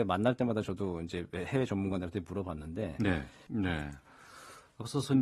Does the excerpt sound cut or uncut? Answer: cut